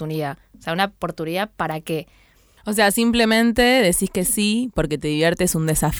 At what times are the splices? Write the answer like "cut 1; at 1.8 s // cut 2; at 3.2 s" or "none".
cut 1; at 2.6 s